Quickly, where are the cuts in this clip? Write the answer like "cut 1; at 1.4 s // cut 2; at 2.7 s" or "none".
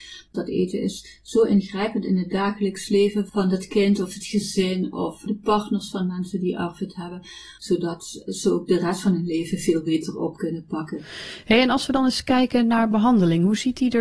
cut 1; at 7.6 s